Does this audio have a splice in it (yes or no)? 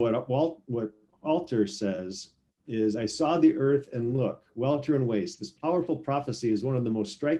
no